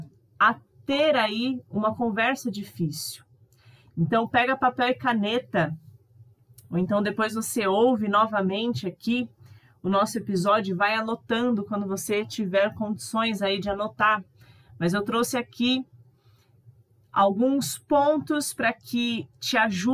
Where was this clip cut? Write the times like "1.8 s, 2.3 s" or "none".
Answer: none

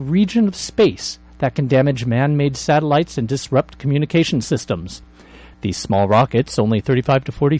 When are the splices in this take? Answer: 5.5 s

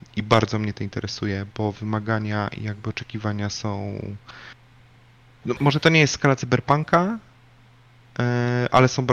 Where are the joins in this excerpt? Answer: 5.6 s

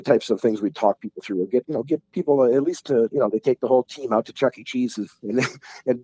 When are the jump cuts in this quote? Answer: 3.1 s

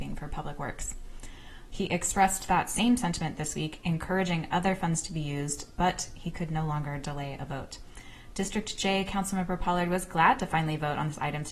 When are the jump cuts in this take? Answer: 1.7 s

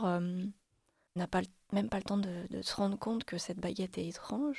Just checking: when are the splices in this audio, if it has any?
1.2 s

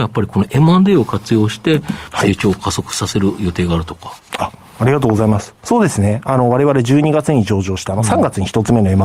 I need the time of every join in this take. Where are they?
2.1 s

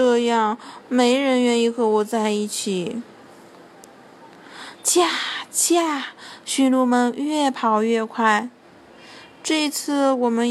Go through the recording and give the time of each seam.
4.7 s

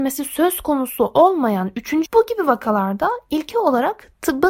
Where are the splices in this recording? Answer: 2.1 s

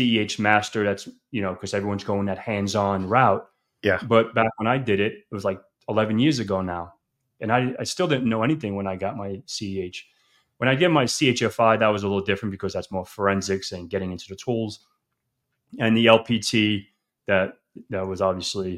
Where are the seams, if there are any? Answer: none

